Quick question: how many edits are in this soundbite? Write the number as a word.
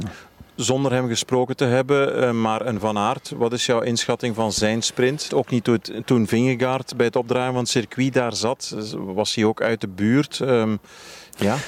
one